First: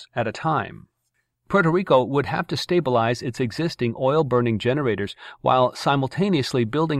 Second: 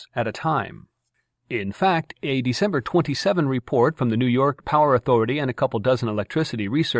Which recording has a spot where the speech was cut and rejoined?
first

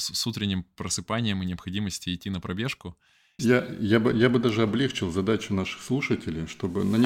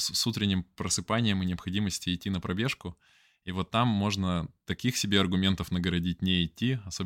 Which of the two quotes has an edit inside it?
first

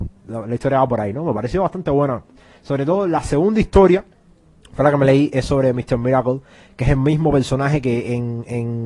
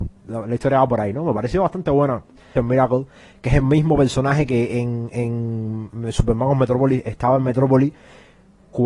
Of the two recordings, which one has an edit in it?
second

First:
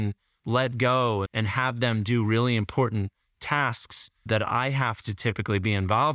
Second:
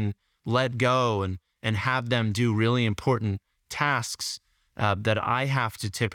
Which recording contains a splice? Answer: first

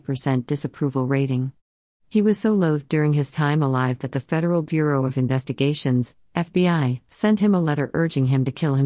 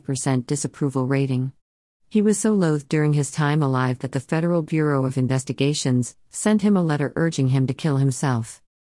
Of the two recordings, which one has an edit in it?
second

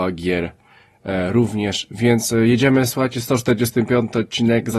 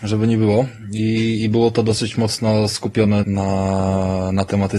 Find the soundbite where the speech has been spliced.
second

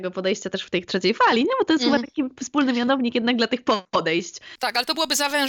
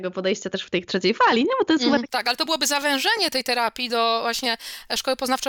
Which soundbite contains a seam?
second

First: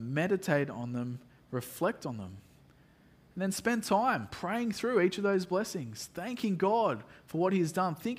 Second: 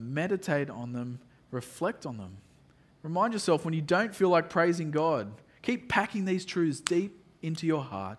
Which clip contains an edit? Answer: second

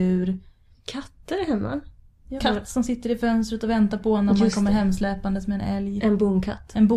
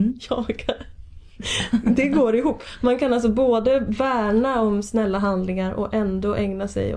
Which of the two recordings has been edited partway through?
first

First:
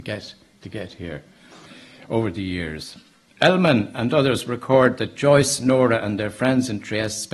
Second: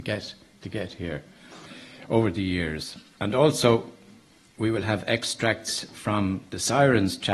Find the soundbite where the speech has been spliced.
second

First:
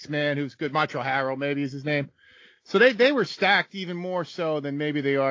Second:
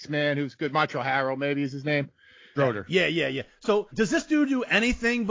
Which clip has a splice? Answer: second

